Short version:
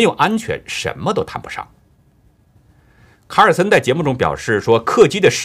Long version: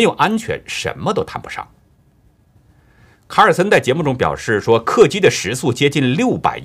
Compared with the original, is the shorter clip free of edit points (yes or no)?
yes